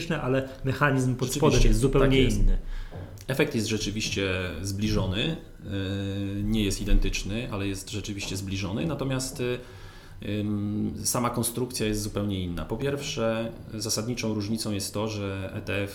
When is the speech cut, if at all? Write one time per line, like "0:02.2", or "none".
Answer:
none